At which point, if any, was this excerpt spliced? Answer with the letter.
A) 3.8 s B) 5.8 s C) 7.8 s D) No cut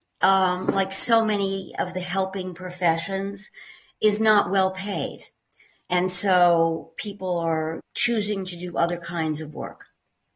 C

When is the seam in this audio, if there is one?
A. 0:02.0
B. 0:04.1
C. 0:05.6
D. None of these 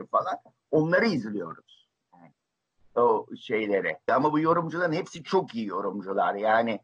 B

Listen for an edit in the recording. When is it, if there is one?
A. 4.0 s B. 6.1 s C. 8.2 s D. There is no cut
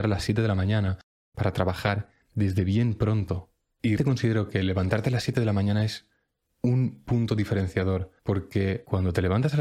A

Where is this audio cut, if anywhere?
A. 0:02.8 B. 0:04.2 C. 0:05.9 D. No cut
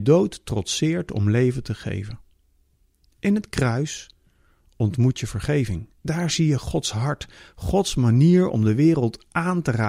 D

